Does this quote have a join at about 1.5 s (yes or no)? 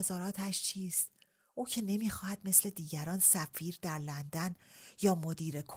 no